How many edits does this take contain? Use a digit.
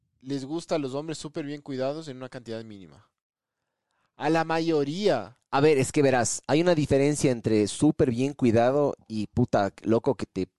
0